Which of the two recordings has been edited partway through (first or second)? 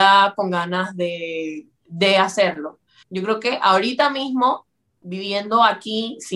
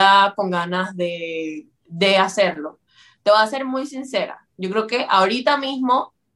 first